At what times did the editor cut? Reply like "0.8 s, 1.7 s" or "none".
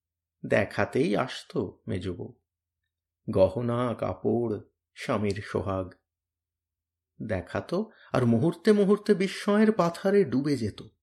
none